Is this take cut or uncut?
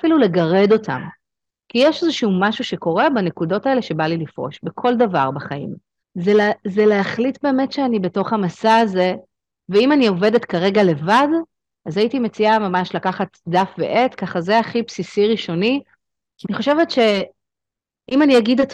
cut